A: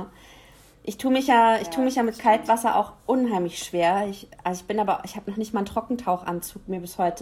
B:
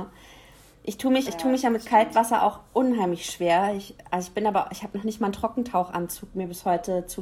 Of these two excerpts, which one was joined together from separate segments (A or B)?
B